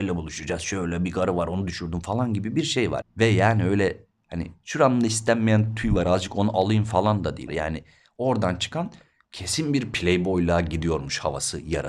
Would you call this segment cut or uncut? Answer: cut